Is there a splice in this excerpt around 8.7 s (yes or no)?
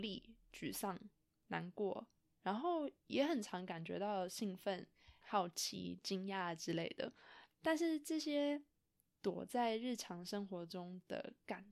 no